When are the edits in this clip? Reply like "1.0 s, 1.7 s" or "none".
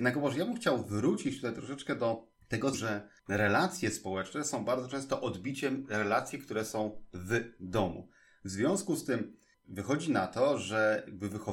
2.7 s